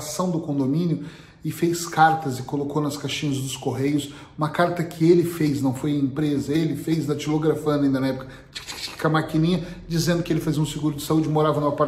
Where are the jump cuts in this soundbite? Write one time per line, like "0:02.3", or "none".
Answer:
0:08.7